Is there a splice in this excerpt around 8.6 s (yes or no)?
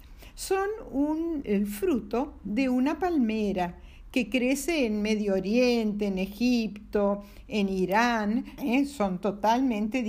yes